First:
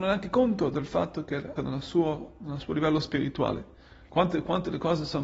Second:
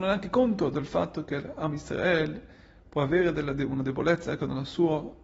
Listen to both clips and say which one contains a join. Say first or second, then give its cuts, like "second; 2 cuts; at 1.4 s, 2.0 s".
first; 2 cuts; at 1.6 s, 4.1 s